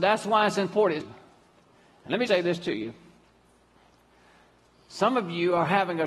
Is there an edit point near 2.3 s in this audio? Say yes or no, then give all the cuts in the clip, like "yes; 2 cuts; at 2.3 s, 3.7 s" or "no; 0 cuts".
yes; 2 cuts; at 1.0 s, 2.3 s